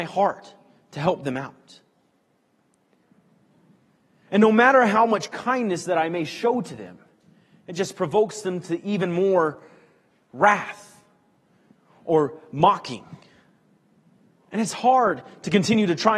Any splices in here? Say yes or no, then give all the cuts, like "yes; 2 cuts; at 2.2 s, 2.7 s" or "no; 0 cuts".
no; 0 cuts